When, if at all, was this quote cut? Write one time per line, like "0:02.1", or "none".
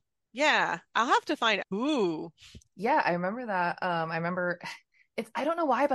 0:01.6